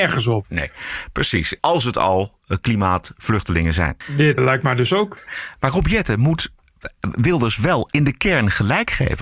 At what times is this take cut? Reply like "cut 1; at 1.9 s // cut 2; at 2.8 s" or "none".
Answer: cut 1; at 1.6 s // cut 2; at 4.4 s